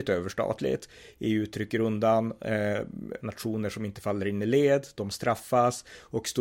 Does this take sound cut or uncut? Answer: cut